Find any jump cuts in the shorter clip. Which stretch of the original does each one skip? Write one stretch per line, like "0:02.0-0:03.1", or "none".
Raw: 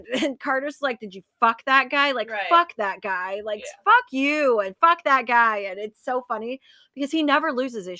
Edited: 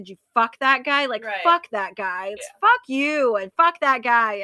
0:03.4-0:03.6